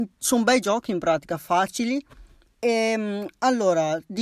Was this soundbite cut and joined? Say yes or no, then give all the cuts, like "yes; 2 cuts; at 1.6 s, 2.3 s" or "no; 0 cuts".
yes; 1 cut; at 2.4 s